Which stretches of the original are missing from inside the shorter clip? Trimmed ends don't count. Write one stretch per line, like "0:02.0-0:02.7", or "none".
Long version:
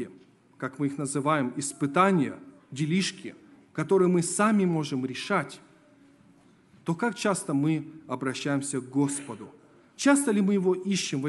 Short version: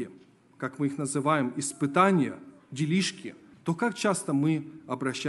0:03.5-0:06.7